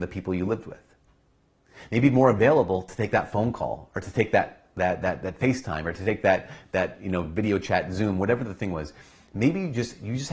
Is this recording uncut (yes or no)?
yes